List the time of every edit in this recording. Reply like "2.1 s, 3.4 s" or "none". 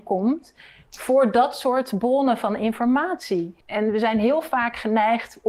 3.6 s